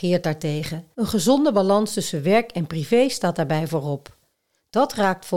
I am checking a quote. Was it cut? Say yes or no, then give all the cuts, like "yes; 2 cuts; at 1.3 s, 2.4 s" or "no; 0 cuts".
yes; 1 cut; at 0.9 s